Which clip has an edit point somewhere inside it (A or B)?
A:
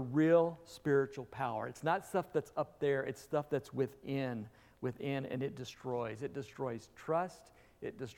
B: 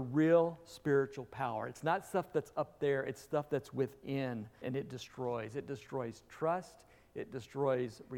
B